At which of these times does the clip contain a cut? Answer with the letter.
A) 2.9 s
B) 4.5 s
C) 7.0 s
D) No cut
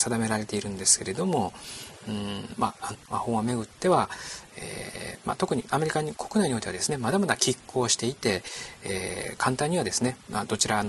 A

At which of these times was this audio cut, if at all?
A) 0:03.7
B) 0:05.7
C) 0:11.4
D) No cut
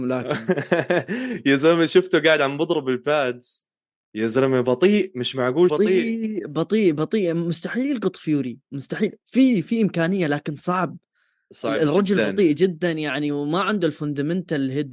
B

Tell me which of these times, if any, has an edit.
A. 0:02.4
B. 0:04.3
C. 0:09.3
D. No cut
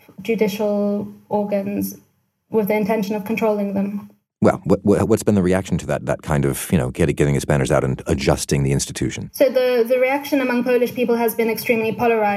D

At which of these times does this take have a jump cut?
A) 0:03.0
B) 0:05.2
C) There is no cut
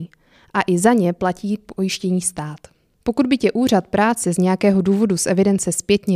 A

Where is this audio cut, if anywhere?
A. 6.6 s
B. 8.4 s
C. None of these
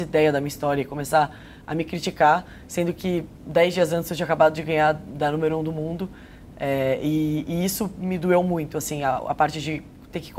C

